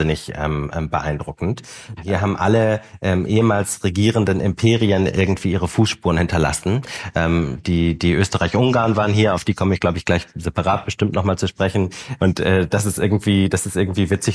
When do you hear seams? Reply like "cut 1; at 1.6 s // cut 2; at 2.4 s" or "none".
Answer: cut 1; at 2.0 s // cut 2; at 12.2 s